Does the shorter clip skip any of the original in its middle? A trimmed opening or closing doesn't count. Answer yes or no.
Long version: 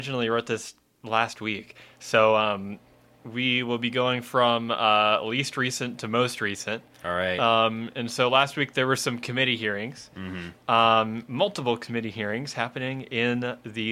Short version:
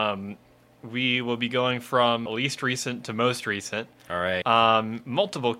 yes